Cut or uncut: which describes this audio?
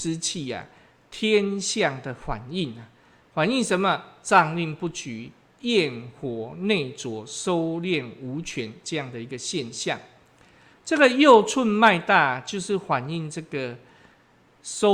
uncut